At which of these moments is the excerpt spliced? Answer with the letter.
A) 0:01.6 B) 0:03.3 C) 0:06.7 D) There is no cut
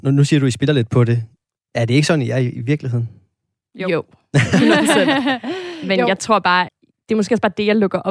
C